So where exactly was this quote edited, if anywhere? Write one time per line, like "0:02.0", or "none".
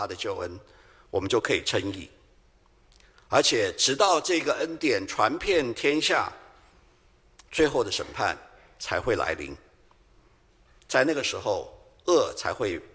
none